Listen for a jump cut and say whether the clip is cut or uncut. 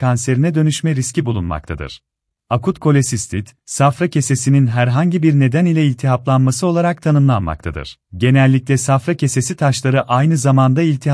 cut